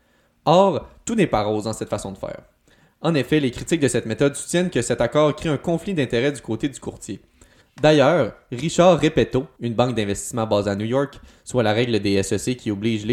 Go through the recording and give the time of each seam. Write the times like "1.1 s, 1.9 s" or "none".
7.6 s, 9.6 s, 11.4 s